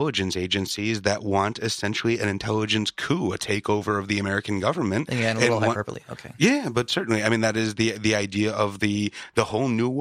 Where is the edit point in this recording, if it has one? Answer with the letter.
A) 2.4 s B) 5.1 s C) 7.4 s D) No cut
D